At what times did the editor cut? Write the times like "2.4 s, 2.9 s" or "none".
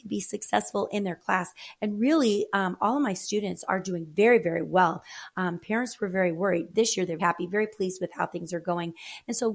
5.3 s, 7.2 s